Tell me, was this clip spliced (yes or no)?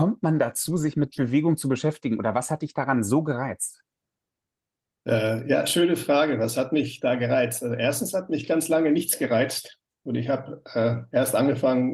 no